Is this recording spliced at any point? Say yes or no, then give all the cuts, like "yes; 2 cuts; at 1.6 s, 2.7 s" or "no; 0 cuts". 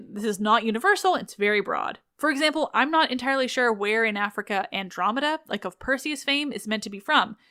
no; 0 cuts